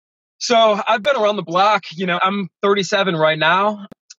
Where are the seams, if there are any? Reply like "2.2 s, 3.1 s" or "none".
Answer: 2.2 s

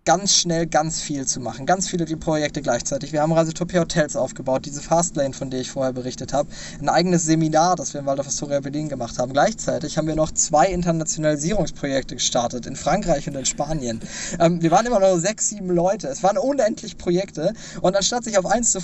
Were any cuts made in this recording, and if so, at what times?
none

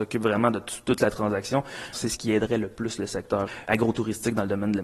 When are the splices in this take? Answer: 1.9 s

